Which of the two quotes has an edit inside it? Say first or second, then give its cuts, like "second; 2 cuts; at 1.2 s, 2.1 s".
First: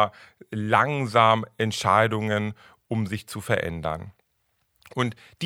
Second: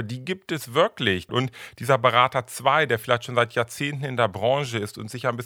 second; 1 cut; at 1.3 s